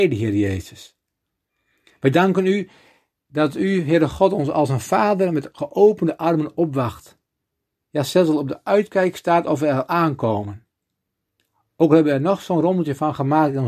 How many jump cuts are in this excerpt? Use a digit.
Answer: 0